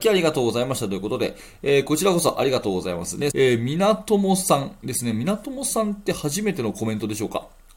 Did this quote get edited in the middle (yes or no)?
yes